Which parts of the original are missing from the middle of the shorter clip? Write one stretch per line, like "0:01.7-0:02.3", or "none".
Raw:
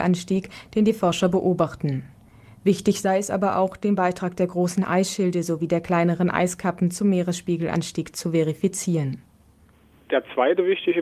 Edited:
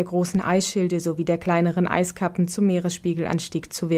none